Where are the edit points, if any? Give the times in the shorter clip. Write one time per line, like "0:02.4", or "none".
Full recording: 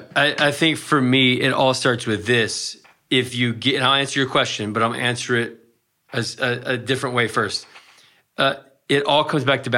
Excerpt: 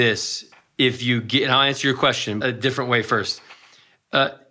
0:02.4